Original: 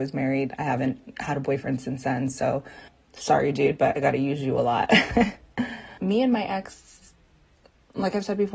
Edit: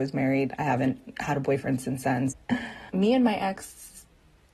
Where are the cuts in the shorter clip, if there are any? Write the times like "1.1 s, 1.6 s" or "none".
2.3 s